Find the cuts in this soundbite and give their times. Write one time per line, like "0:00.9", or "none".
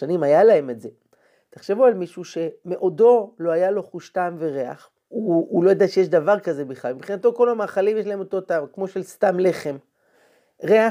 0:05.1